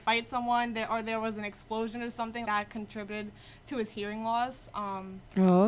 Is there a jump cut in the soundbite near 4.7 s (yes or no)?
no